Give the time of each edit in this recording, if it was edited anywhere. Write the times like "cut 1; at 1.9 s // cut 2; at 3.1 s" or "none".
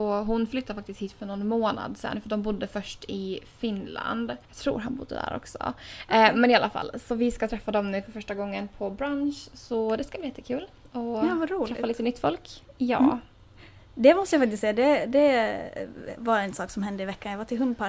cut 1; at 4.5 s